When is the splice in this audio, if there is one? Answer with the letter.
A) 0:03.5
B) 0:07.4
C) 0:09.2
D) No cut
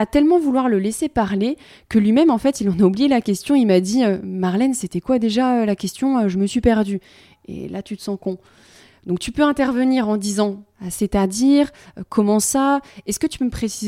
D